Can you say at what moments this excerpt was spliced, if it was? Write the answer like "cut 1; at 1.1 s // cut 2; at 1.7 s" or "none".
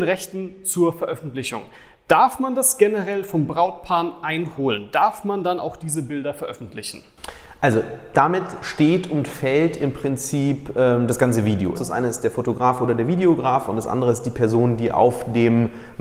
cut 1; at 11.8 s